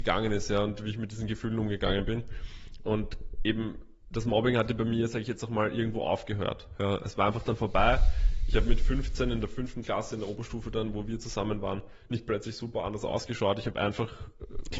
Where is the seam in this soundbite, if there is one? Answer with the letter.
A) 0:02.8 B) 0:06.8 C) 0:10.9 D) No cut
D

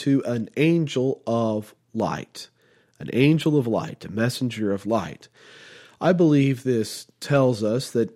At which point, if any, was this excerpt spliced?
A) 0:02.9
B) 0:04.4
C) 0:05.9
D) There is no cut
D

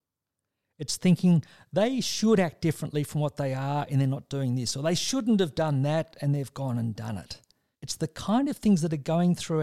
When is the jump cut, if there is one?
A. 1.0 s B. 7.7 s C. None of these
B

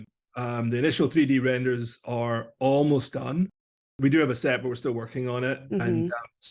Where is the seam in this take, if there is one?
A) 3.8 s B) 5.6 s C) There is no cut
C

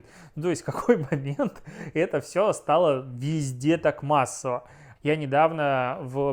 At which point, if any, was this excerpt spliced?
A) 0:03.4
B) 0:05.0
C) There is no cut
B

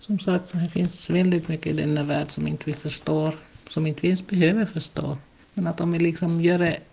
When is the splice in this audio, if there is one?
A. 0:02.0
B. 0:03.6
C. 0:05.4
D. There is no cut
D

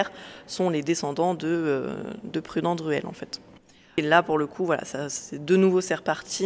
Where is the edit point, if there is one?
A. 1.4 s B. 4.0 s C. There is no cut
B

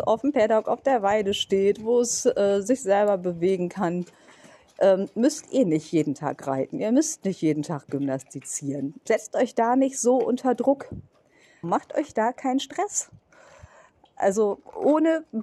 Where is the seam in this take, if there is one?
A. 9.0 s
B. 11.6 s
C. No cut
B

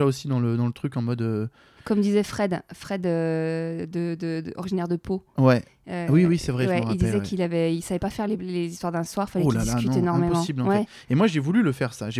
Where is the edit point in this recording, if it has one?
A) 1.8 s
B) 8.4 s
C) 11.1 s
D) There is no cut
A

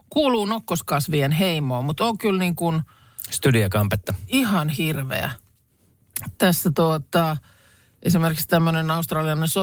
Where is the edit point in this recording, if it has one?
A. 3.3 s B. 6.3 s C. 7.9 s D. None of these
D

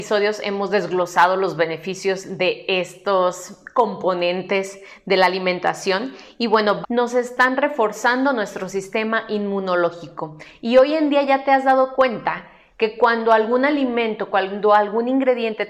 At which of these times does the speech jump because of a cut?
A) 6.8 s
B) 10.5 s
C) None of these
A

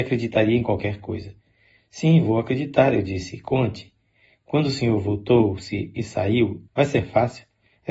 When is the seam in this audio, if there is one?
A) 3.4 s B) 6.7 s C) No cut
B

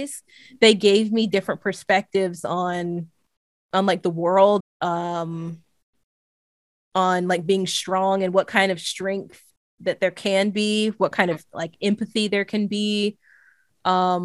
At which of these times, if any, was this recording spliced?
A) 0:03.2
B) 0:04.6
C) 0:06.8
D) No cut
B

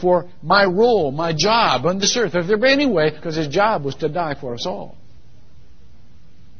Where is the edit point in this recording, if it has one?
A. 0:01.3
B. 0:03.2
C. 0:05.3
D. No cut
B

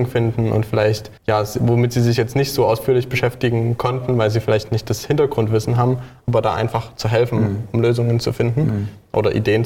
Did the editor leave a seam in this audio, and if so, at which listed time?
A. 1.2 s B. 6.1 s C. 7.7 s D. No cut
A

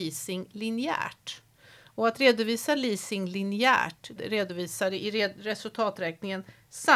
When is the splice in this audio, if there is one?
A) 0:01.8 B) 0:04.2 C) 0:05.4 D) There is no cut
B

